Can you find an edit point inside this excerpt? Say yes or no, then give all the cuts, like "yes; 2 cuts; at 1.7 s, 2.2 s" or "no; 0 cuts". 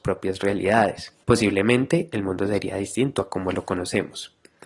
yes; 1 cut; at 1.2 s